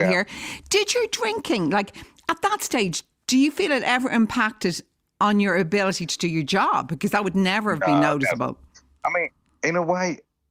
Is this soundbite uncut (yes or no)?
yes